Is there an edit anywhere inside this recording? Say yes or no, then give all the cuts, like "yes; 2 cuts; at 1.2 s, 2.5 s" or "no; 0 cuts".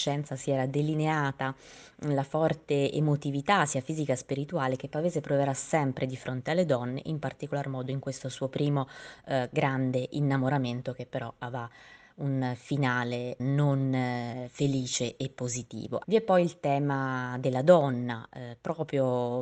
yes; 2 cuts; at 13.4 s, 16.0 s